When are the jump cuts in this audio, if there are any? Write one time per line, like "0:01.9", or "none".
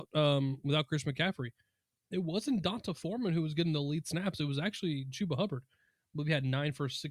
none